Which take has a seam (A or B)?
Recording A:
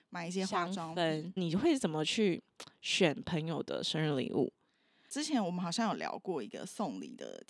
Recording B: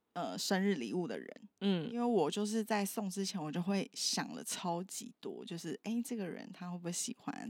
A